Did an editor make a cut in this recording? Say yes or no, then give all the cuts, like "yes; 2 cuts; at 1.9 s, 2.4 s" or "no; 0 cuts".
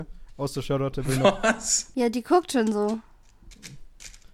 yes; 1 cut; at 1.9 s